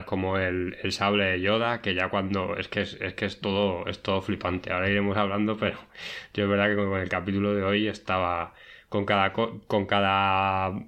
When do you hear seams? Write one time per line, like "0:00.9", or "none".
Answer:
none